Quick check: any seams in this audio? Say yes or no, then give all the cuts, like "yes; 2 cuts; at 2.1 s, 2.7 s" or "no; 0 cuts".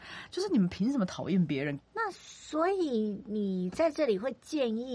yes; 1 cut; at 1.8 s